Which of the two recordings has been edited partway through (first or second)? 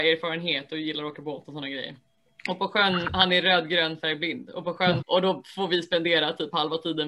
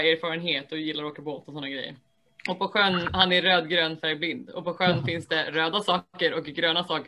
first